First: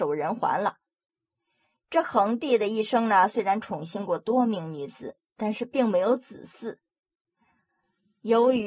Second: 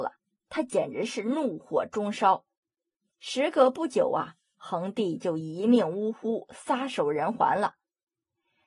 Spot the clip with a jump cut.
second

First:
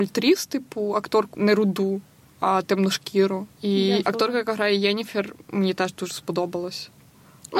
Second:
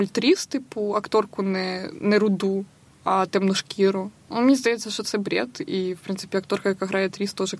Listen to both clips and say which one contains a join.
first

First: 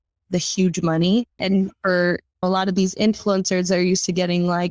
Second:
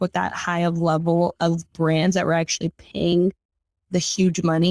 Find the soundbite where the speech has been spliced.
first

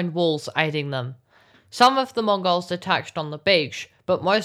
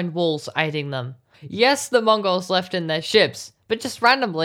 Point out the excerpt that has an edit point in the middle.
second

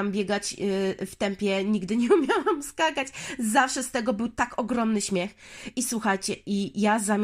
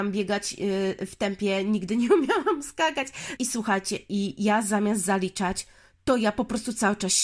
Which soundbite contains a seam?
second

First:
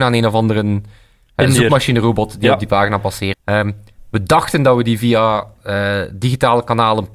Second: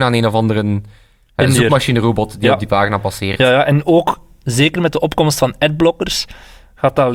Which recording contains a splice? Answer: first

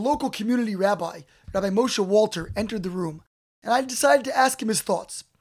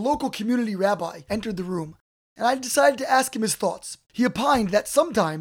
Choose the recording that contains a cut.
second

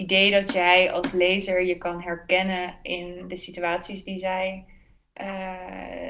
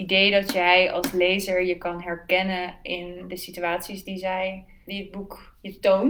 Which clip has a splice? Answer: second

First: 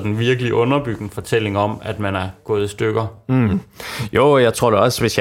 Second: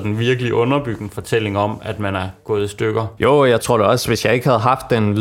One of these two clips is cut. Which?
second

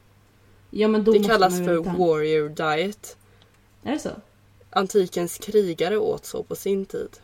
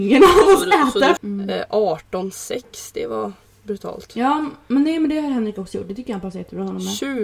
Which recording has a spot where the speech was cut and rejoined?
second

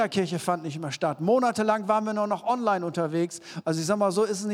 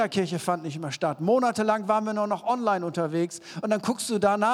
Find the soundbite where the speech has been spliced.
first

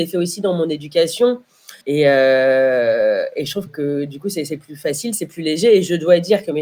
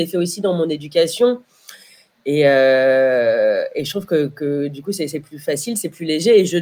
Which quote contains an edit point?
first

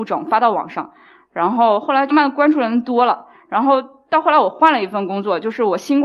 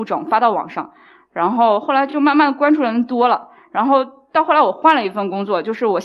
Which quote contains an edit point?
first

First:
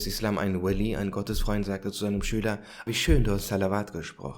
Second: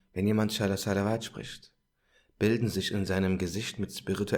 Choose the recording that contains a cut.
first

